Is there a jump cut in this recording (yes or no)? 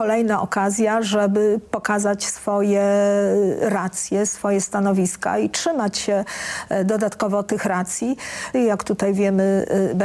yes